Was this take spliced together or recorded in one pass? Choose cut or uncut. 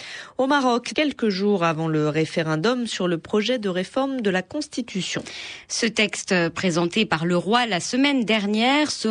cut